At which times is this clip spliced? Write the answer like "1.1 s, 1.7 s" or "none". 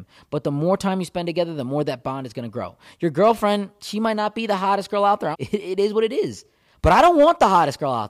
5.3 s